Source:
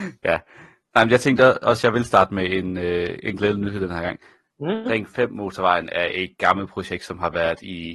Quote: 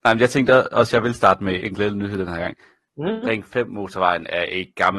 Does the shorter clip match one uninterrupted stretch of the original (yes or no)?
no